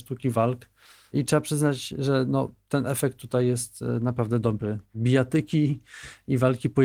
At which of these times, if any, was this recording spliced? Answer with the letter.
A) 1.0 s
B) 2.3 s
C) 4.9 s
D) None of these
C